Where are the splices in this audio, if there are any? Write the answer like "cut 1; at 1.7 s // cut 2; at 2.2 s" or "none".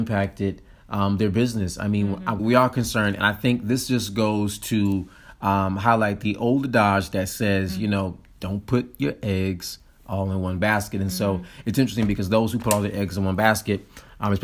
cut 1; at 2.4 s